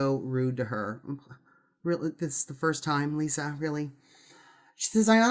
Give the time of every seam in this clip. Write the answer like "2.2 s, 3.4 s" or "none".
2.2 s